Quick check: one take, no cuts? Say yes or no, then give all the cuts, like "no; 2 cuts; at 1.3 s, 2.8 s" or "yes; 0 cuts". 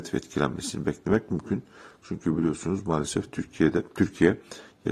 yes; 0 cuts